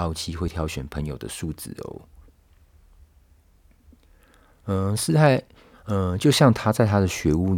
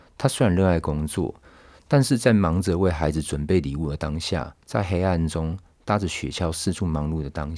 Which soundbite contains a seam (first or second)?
first